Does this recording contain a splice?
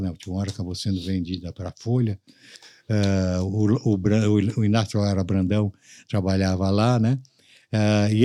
no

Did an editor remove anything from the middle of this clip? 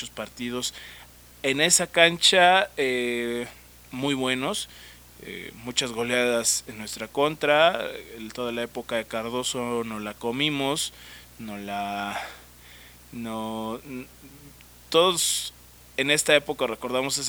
no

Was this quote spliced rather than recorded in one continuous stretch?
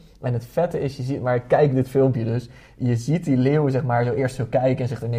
no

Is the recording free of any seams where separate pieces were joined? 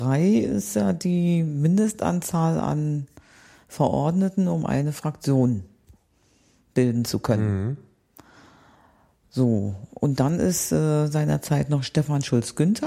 yes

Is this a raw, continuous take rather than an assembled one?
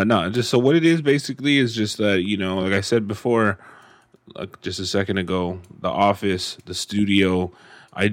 yes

